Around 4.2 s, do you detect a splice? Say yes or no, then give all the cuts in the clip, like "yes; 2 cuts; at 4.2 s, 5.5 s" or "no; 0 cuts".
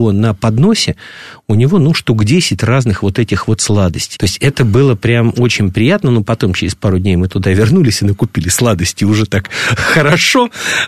yes; 1 cut; at 4.2 s